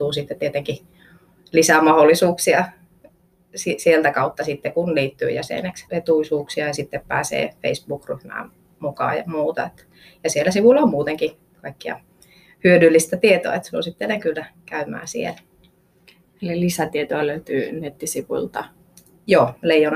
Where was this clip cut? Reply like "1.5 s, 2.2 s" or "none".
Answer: 5.9 s